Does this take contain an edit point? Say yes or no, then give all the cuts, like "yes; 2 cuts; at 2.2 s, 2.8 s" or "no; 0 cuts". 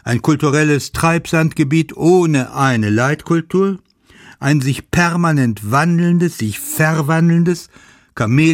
no; 0 cuts